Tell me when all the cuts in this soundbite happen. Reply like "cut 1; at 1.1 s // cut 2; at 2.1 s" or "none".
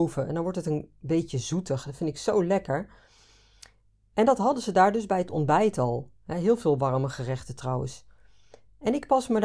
none